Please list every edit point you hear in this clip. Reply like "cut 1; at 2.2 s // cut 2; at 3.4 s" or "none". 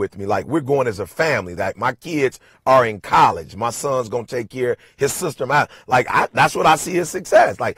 none